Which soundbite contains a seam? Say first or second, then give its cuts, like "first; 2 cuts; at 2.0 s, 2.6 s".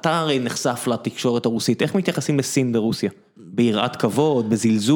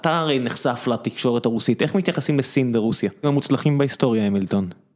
second; 1 cut; at 3.2 s